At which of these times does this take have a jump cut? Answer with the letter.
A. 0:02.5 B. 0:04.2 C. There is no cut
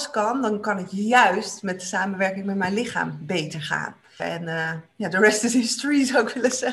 B